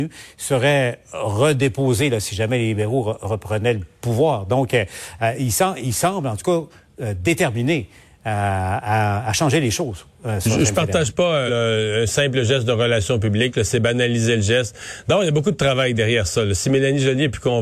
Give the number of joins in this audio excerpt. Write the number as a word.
one